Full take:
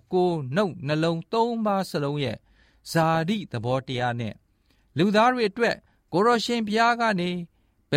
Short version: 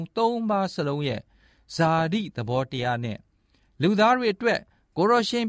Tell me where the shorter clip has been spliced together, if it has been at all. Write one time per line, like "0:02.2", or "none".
none